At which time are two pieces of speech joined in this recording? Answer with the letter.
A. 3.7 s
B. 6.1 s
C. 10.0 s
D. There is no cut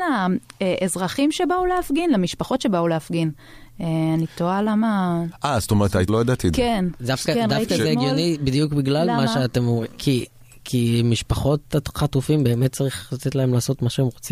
B